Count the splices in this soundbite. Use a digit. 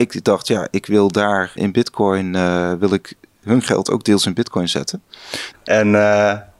2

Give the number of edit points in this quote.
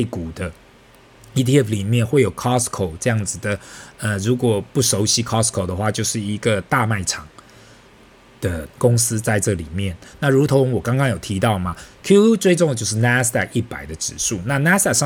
1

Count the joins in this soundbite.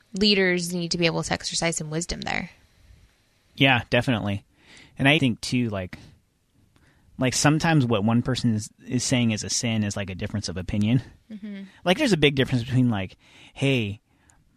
1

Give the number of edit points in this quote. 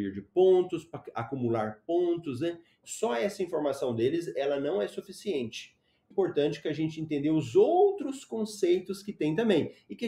2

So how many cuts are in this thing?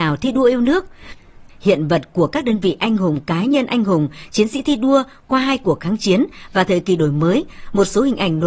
1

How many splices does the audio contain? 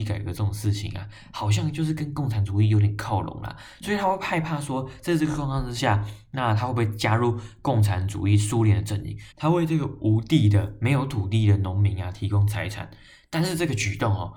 1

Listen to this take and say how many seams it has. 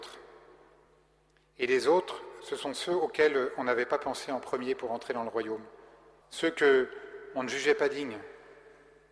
1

